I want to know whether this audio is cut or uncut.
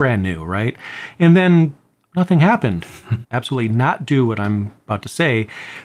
cut